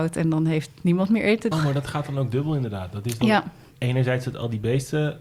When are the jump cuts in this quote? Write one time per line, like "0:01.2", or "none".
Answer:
0:01.5